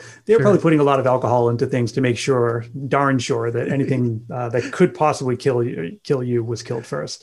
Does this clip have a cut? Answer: no; 0 cuts

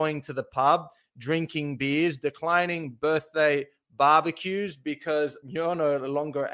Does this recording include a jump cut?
no; 0 cuts

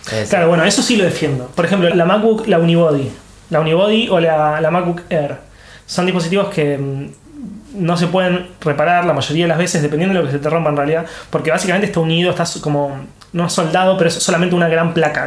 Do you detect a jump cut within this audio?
yes; 1 cut; at 1.9 s

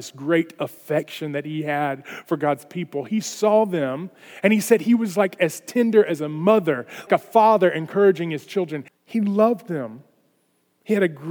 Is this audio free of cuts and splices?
no; 2 cuts; at 7.1 s, 8.9 s

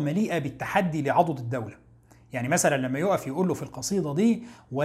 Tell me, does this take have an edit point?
no; 0 cuts

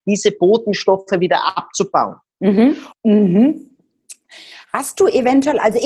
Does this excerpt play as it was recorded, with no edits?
no; 1 cut; at 2.9 s

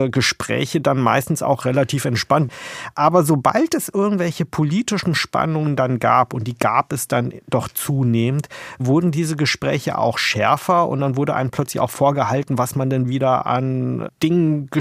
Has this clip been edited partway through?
no; 0 cuts

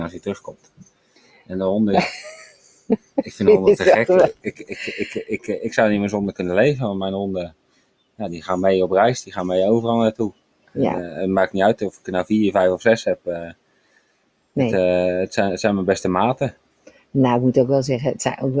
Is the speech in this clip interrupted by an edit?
no; 0 cuts

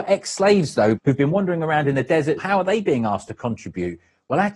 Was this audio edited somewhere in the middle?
yes; 2 cuts; at 1.0 s, 2.4 s

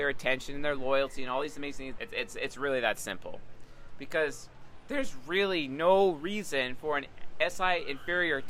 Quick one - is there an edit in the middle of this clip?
yes; 1 cut; at 2.0 s

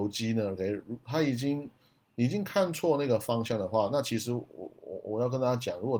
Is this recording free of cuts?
yes; 0 cuts

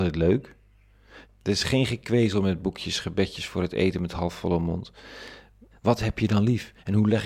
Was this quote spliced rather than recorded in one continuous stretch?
yes; 2 cuts; at 1.2 s, 5.7 s

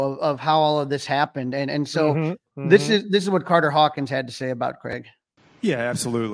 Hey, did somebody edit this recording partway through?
no; 0 cuts

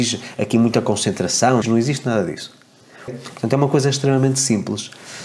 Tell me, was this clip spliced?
yes; 2 cuts; at 1.6 s, 3.1 s

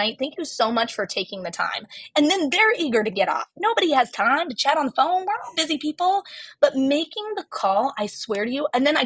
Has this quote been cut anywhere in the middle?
no; 0 cuts

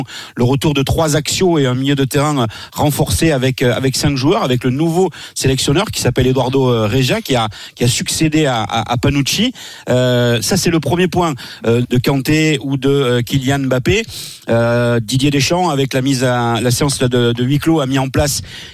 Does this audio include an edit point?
yes; 1 cut; at 11.8 s

